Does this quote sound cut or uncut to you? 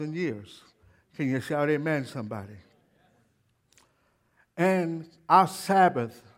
uncut